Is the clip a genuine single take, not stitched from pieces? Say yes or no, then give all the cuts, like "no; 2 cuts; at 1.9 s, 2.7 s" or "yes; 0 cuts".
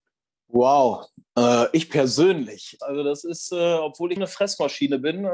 no; 2 cuts; at 2.8 s, 4.2 s